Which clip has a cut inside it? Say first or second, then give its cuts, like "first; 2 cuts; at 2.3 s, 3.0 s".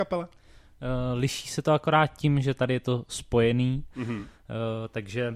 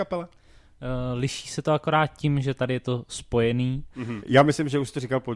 second; 1 cut; at 4.2 s